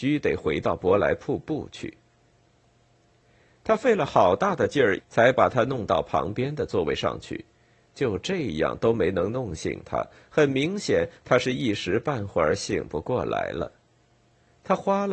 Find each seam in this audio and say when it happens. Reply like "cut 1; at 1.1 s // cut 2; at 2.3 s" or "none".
cut 1; at 5.0 s